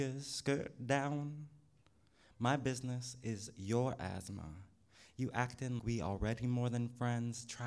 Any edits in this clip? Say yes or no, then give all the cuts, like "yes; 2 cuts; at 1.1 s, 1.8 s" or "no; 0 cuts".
yes; 1 cut; at 5.8 s